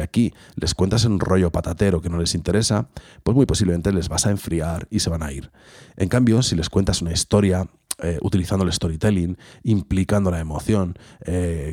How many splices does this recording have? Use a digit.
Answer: 0